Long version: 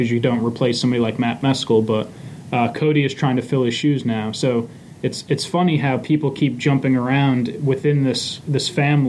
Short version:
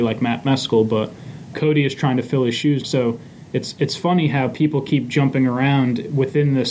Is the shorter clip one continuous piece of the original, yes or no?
no